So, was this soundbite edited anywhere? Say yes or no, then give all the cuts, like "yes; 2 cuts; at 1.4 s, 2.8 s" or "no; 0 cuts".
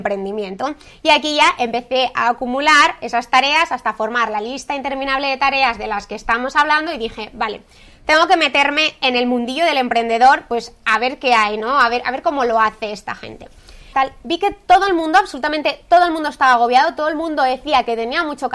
yes; 1 cut; at 13.9 s